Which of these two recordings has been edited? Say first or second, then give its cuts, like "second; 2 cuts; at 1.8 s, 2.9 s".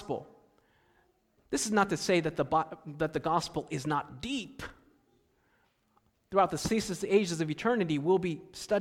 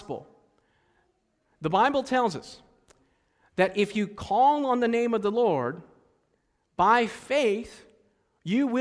first; 1 cut; at 1.4 s